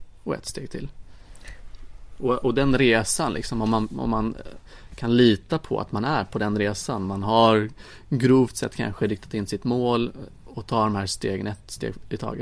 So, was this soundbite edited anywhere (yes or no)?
no